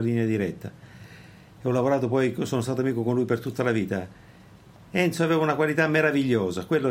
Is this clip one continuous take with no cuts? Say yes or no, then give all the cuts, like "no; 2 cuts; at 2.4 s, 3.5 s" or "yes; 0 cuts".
yes; 0 cuts